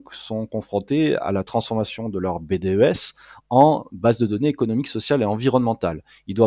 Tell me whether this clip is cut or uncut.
uncut